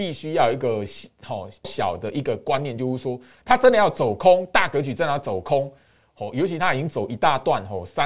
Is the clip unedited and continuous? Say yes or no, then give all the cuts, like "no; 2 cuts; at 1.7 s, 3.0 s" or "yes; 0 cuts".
no; 1 cut; at 1.6 s